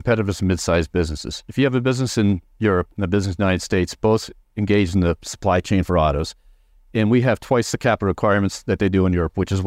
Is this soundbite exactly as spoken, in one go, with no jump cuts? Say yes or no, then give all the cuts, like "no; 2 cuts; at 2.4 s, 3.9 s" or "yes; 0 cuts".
yes; 0 cuts